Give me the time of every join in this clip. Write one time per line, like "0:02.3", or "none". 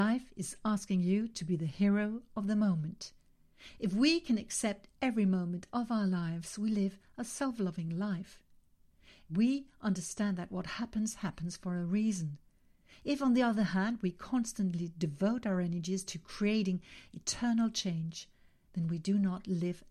none